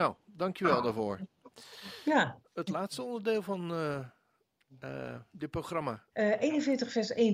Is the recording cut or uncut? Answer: cut